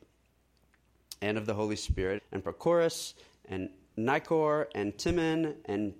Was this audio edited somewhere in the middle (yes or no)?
yes